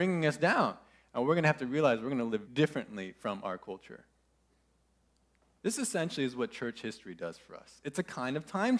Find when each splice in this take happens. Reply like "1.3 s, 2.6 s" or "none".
2.4 s, 5.6 s